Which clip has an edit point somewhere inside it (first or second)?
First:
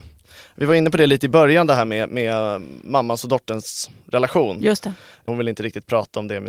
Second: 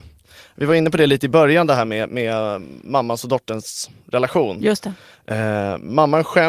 first